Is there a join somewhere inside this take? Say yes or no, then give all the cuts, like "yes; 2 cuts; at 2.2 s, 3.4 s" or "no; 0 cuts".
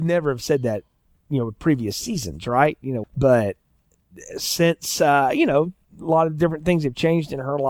yes; 1 cut; at 3.0 s